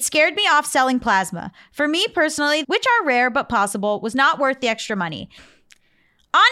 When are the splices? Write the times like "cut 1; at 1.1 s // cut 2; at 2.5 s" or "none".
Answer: cut 1; at 2.6 s // cut 2; at 5.4 s